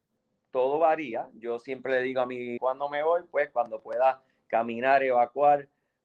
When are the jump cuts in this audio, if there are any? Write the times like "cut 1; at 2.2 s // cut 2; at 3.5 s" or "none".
cut 1; at 2.6 s